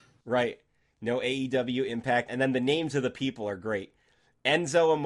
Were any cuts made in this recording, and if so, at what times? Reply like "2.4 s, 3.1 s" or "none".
2.3 s